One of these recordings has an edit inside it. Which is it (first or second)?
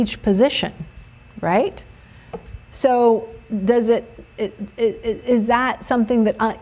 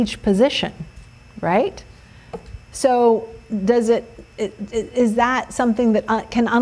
second